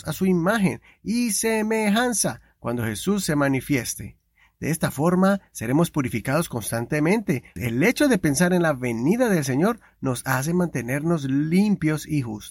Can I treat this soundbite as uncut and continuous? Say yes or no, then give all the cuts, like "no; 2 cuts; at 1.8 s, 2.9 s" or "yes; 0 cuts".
no; 1 cut; at 7.6 s